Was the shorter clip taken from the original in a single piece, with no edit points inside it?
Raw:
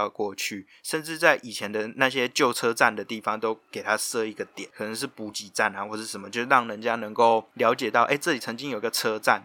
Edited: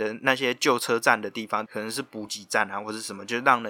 no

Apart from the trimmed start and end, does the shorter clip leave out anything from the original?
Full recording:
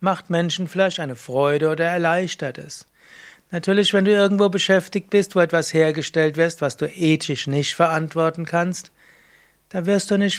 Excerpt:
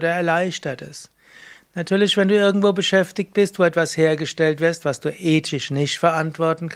no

